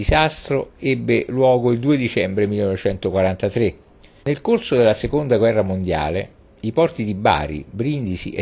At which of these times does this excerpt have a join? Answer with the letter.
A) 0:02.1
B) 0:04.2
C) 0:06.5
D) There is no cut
B